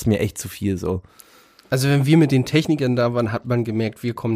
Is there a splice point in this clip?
no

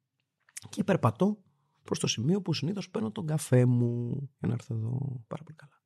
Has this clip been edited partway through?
no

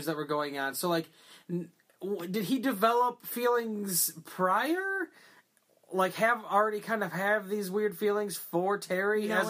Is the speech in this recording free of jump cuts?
yes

